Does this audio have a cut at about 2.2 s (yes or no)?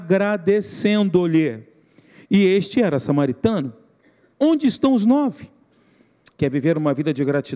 no